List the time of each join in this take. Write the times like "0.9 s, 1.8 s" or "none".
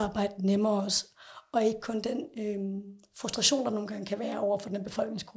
none

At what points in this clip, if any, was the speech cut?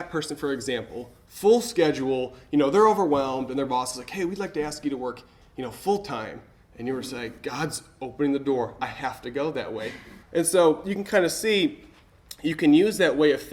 10.2 s

